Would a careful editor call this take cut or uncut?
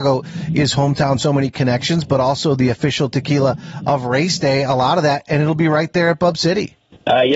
uncut